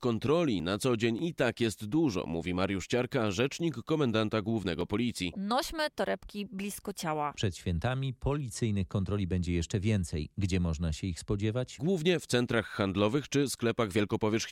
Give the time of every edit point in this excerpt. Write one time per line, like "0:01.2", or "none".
0:05.3
0:07.3